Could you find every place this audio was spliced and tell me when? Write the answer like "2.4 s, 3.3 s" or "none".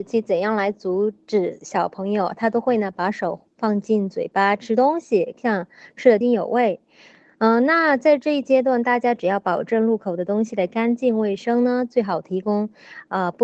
6.2 s